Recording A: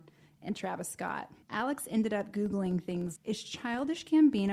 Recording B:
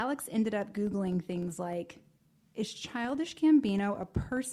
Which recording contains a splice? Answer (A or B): A